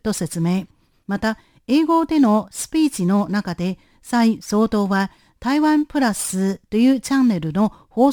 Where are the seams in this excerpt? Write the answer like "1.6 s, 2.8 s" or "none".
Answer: 1.0 s